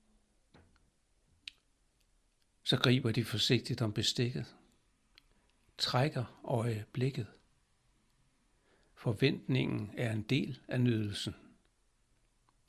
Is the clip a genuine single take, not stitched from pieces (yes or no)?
yes